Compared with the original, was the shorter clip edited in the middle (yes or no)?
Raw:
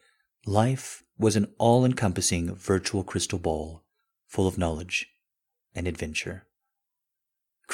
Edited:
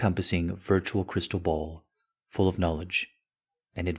no